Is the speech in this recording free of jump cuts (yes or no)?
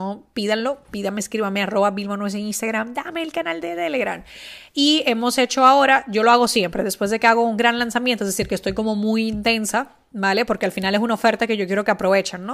yes